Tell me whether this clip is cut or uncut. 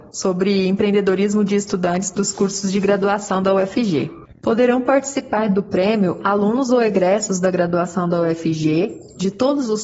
uncut